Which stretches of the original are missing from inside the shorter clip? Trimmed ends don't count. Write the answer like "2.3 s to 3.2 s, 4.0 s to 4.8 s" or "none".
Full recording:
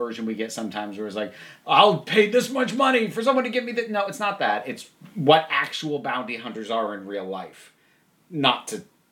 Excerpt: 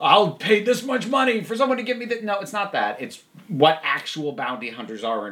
none